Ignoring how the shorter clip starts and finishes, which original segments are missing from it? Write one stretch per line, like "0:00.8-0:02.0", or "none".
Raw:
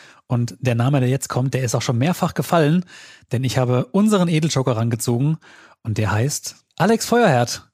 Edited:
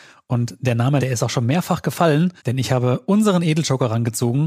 0:01.0-0:01.5
0:02.9-0:03.2